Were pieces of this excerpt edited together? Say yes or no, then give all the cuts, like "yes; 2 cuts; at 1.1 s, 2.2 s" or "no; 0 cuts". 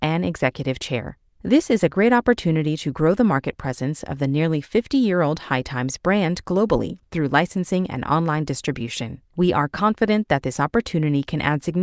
no; 0 cuts